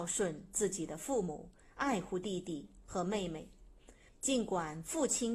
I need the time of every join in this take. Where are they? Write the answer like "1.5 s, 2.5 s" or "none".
4.1 s